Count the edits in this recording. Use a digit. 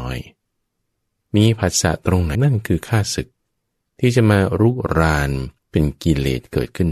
2